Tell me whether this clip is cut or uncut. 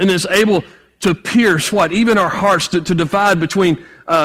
uncut